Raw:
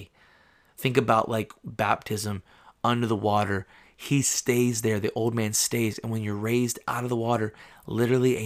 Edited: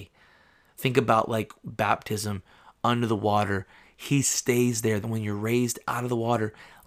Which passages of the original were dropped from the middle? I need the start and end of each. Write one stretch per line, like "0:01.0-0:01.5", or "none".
0:05.0-0:06.0